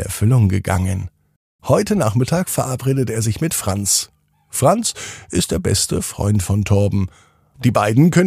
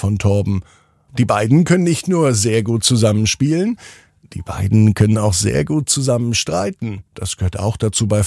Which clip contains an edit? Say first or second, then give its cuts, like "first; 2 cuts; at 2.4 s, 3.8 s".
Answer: second; 1 cut; at 7.1 s